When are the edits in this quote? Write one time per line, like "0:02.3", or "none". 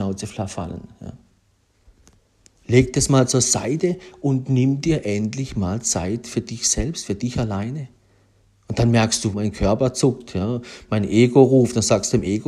0:09.3